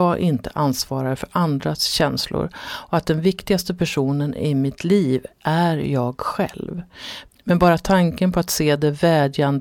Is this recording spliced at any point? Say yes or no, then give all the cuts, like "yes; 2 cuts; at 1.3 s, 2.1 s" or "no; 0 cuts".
no; 0 cuts